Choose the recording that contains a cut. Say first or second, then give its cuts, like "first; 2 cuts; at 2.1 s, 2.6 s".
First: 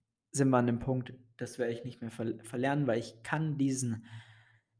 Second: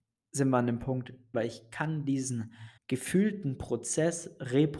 second; 2 cuts; at 1.3 s, 2.8 s